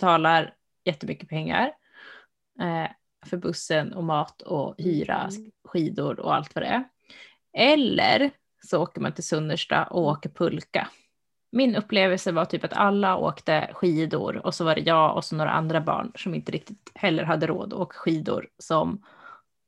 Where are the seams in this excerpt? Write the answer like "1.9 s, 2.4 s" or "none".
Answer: 11.4 s